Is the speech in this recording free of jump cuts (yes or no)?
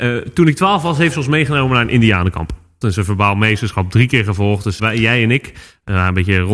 no